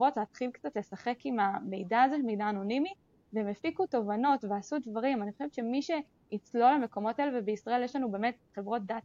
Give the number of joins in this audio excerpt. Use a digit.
0